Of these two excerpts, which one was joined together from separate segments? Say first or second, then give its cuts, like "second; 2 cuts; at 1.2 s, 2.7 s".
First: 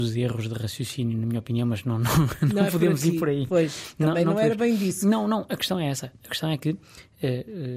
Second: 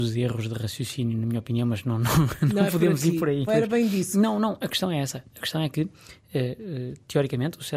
second; 1 cut; at 3.5 s